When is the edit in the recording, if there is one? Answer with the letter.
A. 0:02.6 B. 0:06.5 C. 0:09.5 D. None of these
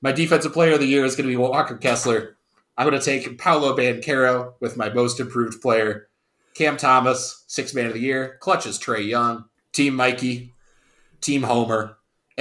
C